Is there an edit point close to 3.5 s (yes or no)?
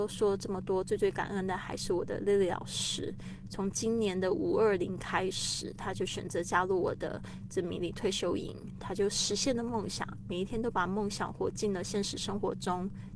no